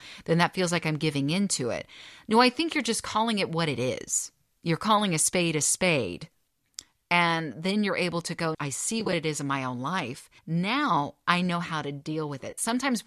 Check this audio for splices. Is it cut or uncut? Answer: cut